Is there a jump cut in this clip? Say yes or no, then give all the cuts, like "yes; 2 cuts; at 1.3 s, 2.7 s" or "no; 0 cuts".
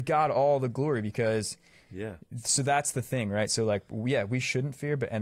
no; 0 cuts